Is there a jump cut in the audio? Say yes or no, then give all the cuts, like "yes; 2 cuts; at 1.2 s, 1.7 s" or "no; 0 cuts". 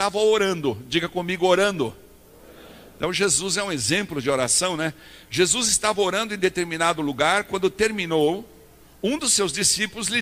no; 0 cuts